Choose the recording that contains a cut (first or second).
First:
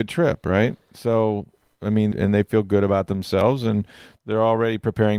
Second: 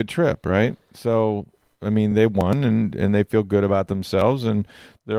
first